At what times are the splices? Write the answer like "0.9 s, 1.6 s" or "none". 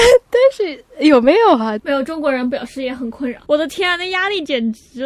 1.8 s, 3.5 s